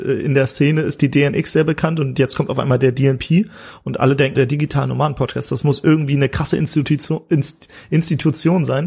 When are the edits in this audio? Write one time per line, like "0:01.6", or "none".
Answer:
0:04.3